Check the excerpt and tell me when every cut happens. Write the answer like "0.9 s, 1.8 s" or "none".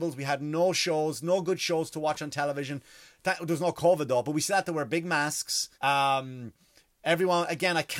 5.7 s